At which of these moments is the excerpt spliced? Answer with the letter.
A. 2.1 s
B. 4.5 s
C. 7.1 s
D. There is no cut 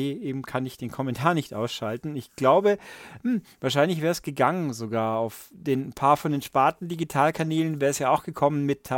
D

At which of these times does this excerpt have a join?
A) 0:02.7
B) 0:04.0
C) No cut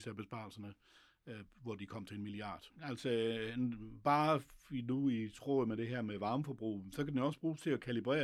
A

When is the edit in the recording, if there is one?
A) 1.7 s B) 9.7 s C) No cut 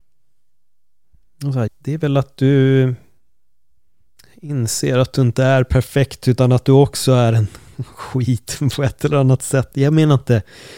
A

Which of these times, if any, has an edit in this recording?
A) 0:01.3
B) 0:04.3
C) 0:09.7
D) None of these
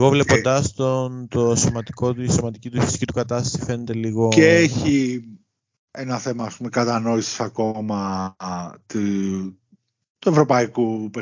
D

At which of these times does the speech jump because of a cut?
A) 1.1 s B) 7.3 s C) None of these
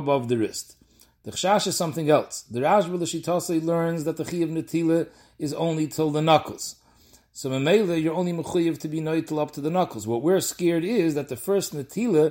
A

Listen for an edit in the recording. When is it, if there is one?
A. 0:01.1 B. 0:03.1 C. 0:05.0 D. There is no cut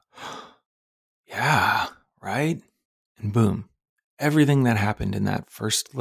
D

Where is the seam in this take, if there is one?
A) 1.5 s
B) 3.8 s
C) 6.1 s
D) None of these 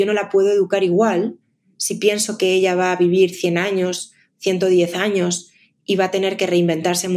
D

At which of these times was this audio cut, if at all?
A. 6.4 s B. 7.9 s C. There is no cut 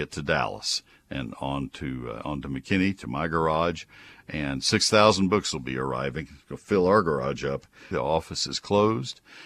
B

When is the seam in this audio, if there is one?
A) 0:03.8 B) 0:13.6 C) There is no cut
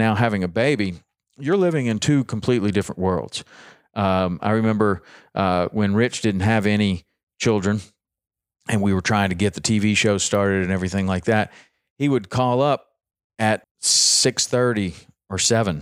B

